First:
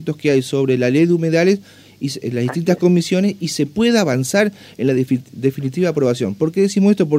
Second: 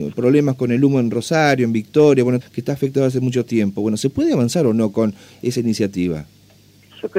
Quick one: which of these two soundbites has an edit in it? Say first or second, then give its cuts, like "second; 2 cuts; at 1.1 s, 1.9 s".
second; 1 cut; at 2.4 s